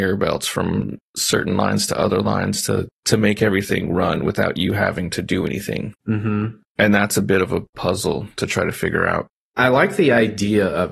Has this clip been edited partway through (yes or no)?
no